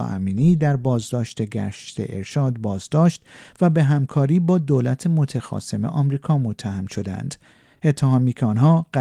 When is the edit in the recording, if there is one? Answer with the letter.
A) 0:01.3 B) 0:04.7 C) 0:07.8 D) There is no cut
D